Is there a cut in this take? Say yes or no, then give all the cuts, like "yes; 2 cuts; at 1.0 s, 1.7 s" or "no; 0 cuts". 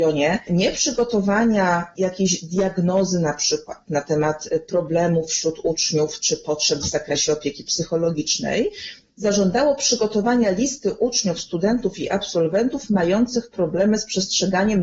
no; 0 cuts